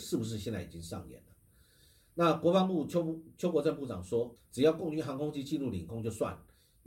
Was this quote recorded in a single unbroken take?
no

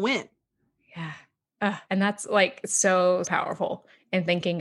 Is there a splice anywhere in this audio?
yes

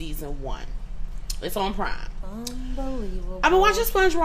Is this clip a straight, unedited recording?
yes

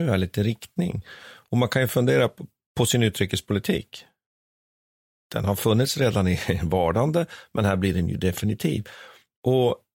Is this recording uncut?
yes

